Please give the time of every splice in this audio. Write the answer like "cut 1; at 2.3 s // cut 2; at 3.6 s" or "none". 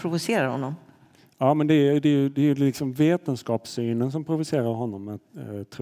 none